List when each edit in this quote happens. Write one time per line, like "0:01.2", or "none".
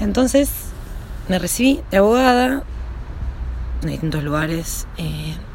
0:03.8